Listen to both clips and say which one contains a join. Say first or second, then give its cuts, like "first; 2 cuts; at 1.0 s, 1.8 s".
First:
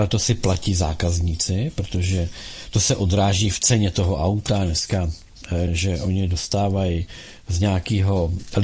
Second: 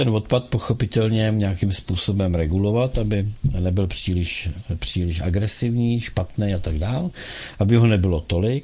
first; 1 cut; at 5.7 s